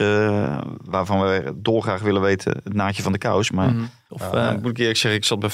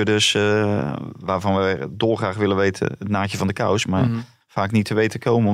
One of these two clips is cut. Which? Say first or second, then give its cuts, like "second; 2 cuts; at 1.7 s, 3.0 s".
first; 1 cut; at 4.1 s